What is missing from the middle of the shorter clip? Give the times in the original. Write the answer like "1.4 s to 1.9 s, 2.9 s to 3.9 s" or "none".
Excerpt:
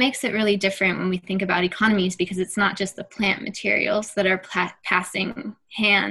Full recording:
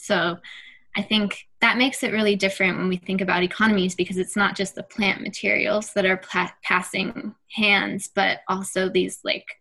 none